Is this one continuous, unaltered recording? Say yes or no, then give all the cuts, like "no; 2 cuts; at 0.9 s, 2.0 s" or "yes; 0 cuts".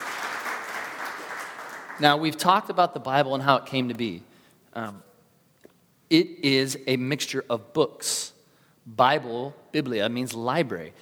yes; 0 cuts